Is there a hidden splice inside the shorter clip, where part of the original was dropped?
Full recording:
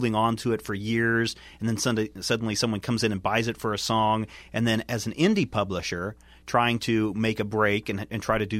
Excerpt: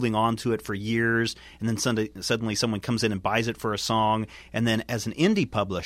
no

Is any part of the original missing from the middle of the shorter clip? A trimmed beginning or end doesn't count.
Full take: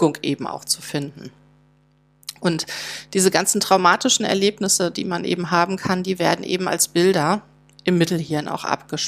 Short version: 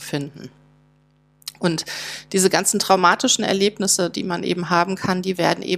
no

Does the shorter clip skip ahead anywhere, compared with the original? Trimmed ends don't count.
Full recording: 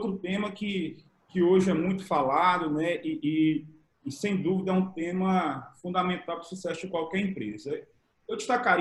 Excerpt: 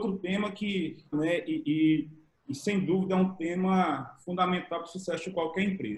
yes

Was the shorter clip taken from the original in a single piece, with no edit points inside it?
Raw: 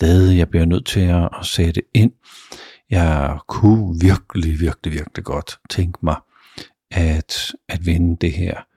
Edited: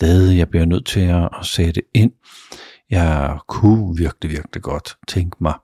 no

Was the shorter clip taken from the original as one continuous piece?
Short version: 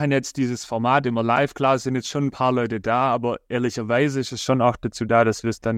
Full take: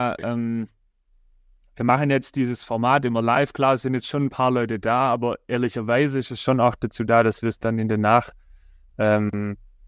yes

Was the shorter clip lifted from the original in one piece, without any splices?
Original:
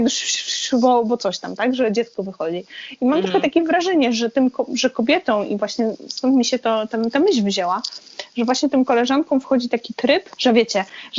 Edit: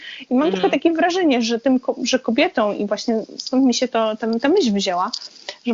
yes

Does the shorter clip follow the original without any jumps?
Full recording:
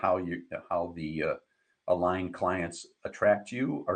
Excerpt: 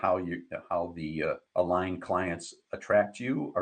no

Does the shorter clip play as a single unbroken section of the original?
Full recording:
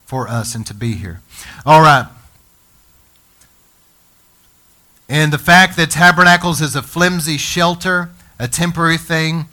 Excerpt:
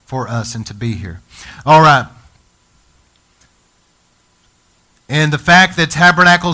yes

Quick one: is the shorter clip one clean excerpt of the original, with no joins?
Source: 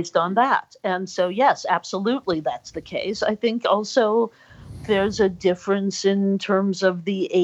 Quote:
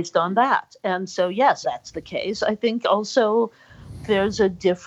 no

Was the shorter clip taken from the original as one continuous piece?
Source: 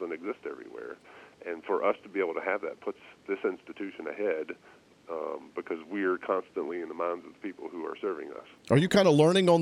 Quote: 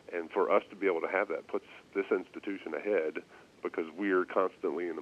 no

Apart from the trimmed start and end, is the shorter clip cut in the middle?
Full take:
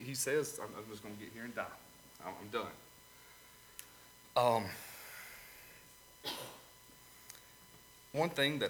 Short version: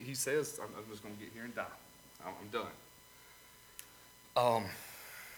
no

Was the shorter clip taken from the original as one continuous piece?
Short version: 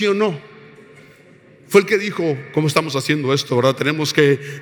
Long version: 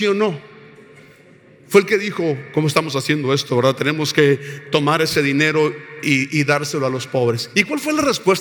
yes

